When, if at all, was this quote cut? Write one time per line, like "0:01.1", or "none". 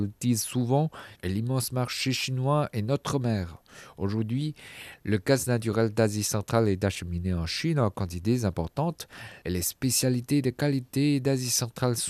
0:01.1